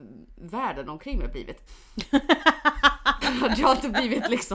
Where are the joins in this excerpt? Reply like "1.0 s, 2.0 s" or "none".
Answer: 1.7 s, 3.2 s